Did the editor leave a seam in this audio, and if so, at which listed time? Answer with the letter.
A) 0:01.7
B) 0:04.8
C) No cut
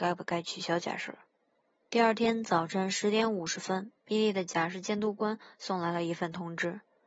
C